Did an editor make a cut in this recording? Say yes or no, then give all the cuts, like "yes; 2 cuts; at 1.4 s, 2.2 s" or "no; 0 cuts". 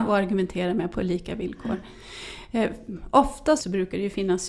yes; 1 cut; at 3.6 s